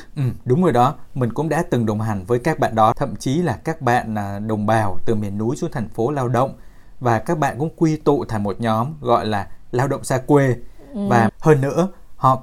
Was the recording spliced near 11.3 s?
yes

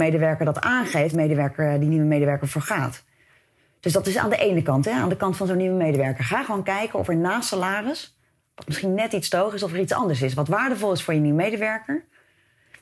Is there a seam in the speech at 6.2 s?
no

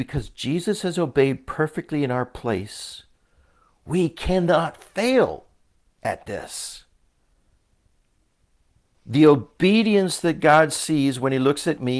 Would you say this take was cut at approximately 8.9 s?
yes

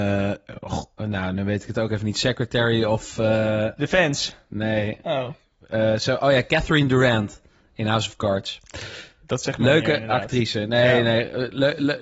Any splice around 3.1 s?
no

